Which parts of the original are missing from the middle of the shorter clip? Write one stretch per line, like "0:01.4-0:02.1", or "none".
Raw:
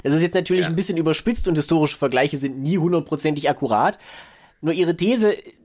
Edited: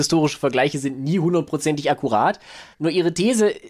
0:04.3-0:04.5